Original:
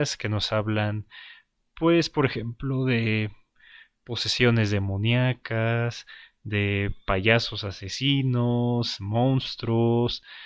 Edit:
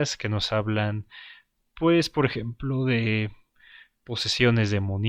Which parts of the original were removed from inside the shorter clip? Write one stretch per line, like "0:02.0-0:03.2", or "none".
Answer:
none